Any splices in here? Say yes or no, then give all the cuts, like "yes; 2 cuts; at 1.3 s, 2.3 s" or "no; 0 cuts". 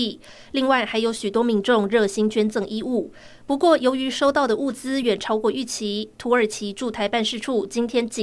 yes; 1 cut; at 5.0 s